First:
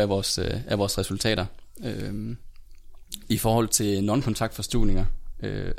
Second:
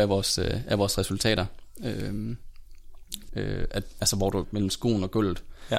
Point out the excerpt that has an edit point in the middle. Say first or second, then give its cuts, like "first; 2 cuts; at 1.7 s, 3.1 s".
second; 2 cuts; at 3.3 s, 4.4 s